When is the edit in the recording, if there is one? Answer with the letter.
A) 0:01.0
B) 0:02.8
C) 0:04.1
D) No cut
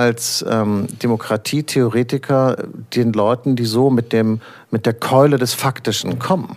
D